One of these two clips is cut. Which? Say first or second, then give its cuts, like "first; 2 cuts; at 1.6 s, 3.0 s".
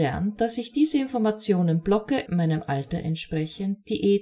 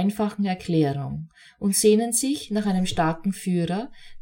first; 1 cut; at 2.3 s